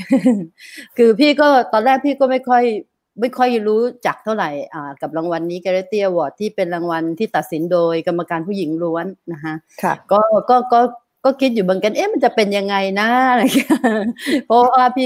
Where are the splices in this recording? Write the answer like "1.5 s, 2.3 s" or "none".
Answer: none